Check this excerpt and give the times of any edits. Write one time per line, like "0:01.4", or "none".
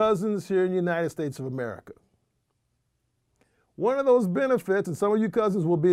none